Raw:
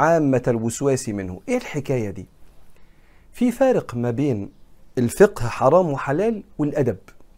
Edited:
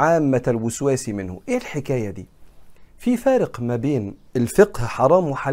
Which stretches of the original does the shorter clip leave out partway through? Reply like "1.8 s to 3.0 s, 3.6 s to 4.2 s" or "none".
2.9 s to 3.2 s, 4.6 s to 4.9 s

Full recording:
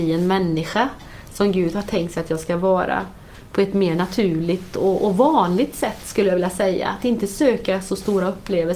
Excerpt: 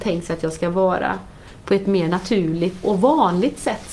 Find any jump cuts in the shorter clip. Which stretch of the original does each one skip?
4.7 s to 5.0 s

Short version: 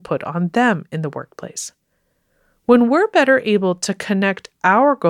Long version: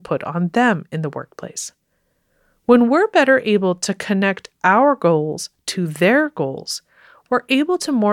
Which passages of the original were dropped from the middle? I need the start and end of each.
none

